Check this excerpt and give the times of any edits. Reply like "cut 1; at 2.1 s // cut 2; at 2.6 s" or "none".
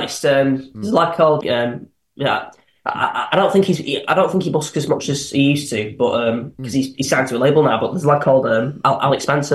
cut 1; at 1.4 s